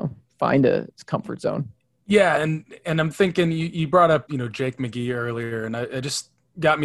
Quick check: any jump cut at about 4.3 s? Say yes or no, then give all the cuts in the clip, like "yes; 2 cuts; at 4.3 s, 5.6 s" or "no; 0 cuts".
yes; 1 cut; at 4.3 s